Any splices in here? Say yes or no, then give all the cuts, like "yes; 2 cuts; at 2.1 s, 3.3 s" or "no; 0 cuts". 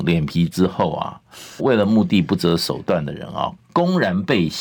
yes; 2 cuts; at 1.6 s, 3.6 s